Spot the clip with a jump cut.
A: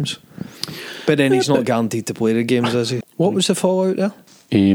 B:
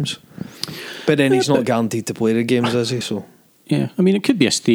A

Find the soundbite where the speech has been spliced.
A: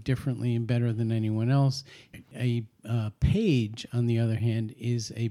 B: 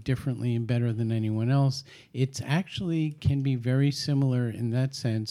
A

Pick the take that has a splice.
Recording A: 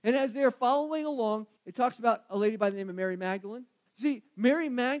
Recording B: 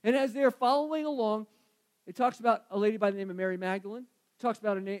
A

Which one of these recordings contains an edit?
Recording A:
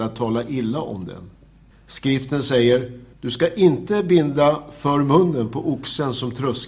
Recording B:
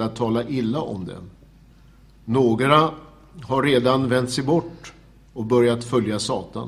A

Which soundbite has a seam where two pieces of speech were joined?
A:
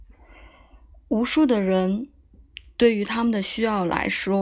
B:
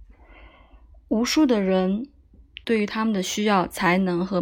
B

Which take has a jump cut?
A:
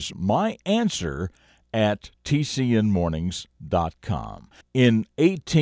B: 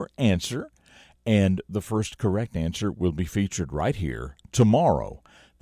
A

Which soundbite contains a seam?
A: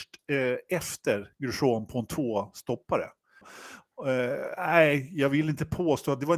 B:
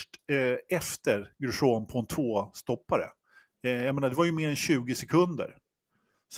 A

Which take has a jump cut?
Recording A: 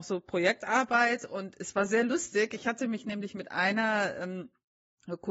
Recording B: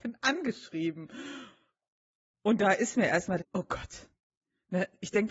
B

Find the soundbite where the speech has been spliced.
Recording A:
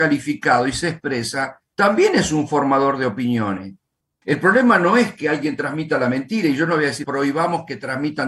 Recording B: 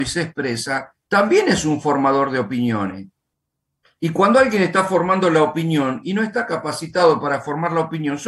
A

